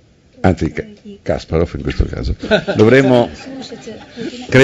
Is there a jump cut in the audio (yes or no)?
no